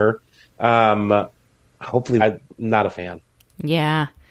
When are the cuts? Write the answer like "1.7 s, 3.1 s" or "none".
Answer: 2.2 s